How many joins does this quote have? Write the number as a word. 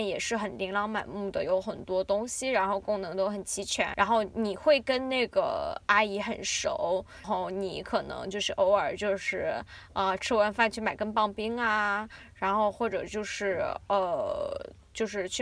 one